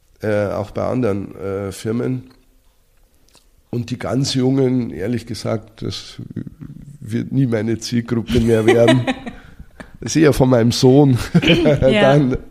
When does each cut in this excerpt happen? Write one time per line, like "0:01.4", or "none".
none